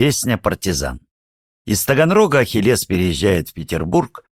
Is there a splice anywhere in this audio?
yes; 1 cut; at 1.5 s

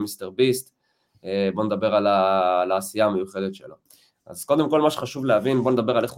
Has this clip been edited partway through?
no; 0 cuts

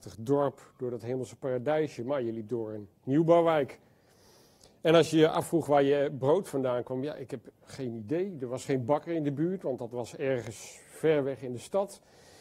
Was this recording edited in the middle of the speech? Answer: no; 0 cuts

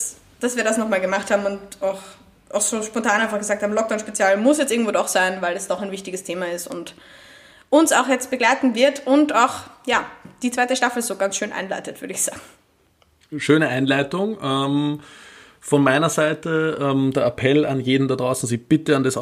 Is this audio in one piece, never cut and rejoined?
yes; 0 cuts

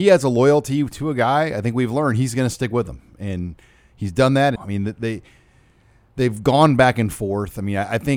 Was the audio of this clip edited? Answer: yes; 1 cut; at 4.6 s

